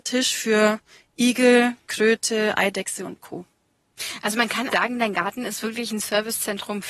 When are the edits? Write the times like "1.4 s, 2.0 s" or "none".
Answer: 4.7 s